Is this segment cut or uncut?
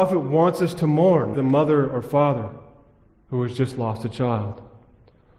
cut